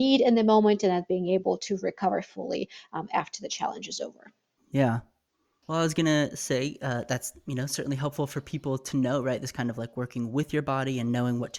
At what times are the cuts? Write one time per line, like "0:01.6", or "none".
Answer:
0:04.6